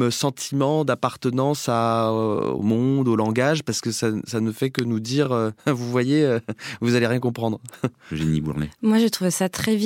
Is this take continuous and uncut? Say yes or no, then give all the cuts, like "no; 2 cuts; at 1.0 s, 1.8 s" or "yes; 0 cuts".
yes; 0 cuts